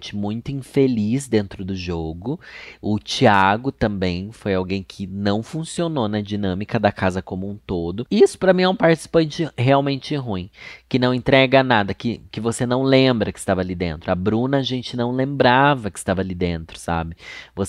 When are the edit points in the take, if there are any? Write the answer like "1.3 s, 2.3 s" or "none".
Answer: none